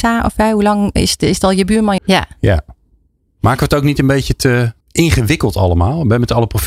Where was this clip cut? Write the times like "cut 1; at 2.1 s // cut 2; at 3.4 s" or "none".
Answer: cut 1; at 2.0 s // cut 2; at 4.8 s